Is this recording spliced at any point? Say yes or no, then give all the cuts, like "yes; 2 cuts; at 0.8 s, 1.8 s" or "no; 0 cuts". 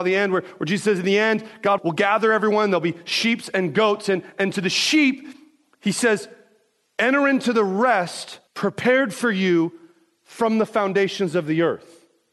yes; 2 cuts; at 1.8 s, 8.5 s